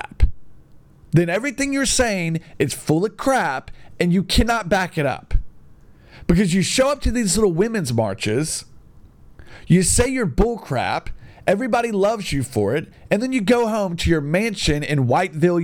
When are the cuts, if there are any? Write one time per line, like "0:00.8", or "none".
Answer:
none